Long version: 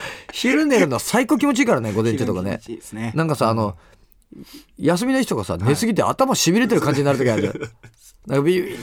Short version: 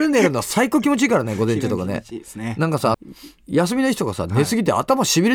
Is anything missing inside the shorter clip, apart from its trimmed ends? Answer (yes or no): yes